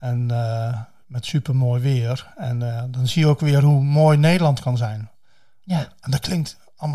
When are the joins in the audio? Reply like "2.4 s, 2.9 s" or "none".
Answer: none